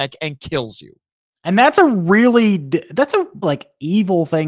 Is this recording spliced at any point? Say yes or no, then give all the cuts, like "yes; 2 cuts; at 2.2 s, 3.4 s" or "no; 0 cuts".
yes; 2 cuts; at 1.3 s, 3.4 s